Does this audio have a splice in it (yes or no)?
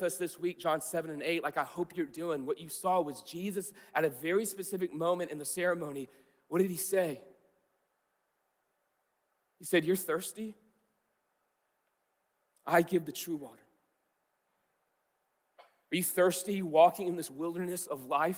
no